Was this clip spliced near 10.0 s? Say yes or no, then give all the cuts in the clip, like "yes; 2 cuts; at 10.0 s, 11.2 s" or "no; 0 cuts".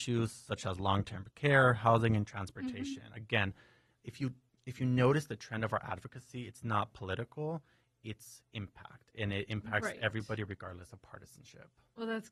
no; 0 cuts